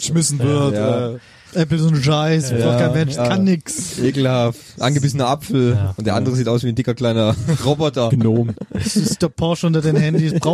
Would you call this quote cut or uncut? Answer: cut